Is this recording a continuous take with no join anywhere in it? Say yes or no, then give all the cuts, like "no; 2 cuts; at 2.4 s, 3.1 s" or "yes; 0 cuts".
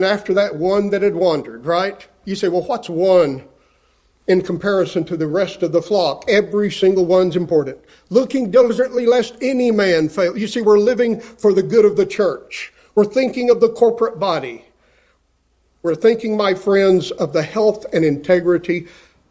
yes; 0 cuts